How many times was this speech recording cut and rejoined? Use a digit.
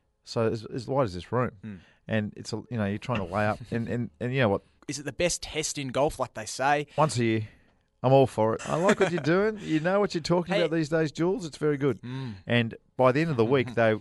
3